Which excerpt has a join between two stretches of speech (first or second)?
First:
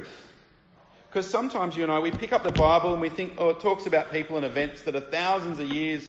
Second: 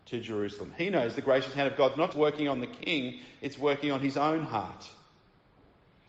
second